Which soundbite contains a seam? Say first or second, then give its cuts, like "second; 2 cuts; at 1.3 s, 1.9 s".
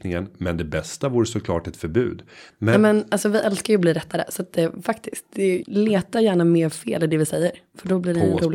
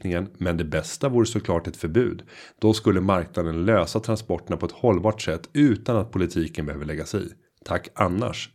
first; 2 cuts; at 2.5 s, 5.6 s